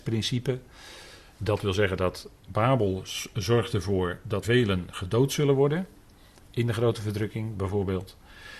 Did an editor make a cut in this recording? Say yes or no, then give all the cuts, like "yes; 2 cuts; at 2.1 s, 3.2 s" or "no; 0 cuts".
yes; 1 cut; at 4.4 s